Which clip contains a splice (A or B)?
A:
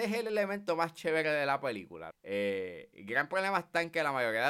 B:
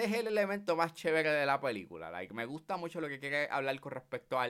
A